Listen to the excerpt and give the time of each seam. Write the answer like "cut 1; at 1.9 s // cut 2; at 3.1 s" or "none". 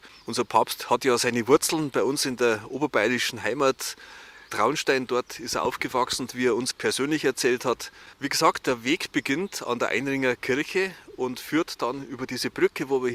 cut 1; at 6.3 s